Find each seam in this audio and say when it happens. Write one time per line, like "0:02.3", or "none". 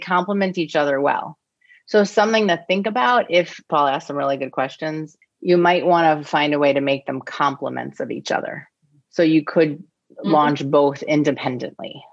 0:03.7
0:05.2